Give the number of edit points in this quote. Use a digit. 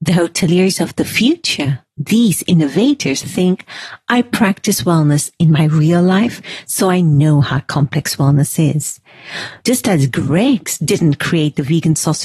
2